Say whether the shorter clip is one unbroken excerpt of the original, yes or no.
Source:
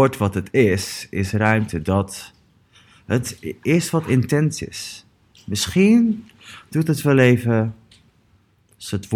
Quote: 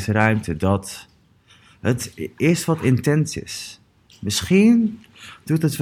yes